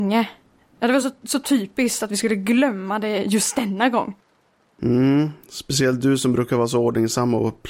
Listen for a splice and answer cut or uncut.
uncut